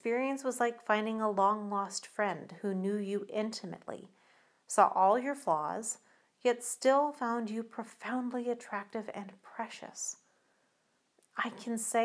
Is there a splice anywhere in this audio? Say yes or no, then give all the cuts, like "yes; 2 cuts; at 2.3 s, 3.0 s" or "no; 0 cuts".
no; 0 cuts